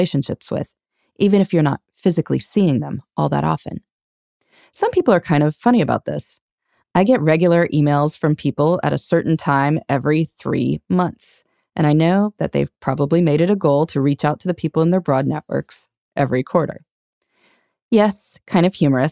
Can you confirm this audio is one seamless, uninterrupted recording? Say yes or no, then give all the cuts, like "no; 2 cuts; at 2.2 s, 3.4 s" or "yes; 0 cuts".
yes; 0 cuts